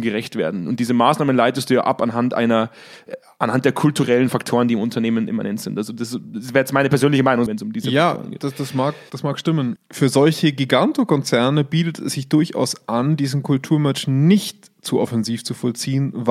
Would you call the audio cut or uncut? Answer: cut